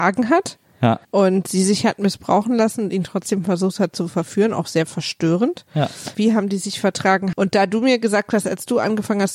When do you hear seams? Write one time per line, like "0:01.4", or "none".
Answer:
0:01.0
0:06.1
0:07.3